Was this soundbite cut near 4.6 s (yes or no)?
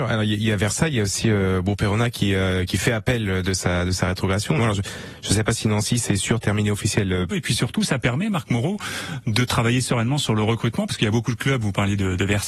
yes